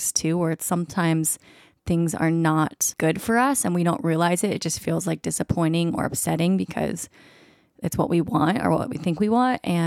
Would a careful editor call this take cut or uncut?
uncut